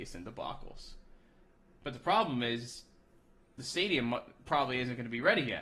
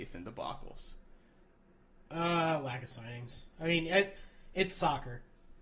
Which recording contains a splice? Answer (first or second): first